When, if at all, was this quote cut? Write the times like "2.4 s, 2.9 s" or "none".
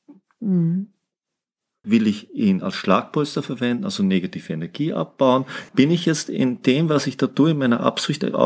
1.8 s, 5.7 s